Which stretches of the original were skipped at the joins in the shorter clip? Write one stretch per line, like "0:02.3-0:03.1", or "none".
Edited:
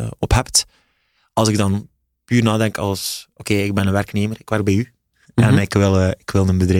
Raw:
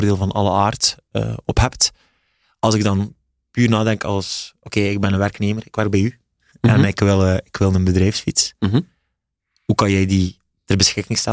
none